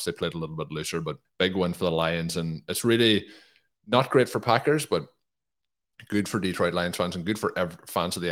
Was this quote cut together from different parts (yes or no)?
no